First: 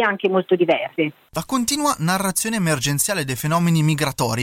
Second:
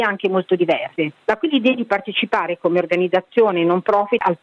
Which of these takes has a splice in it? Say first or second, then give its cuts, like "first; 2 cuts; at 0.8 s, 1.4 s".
second; 1 cut; at 1.2 s